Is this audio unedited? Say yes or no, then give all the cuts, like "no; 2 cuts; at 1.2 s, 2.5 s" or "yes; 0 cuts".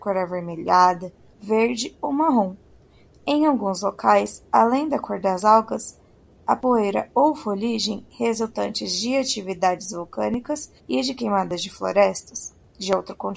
no; 1 cut; at 10.8 s